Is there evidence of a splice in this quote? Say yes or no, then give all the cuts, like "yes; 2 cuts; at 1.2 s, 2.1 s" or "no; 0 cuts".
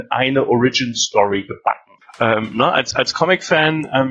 yes; 1 cut; at 2.0 s